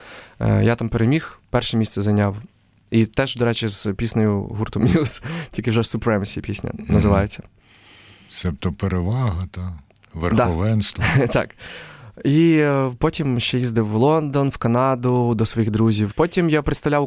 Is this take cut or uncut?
cut